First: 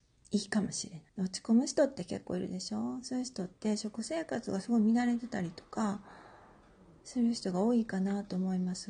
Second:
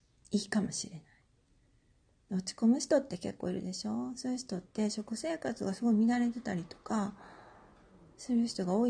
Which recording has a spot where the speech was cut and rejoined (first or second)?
first